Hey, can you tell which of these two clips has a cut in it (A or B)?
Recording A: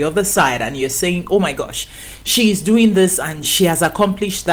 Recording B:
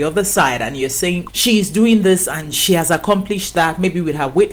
B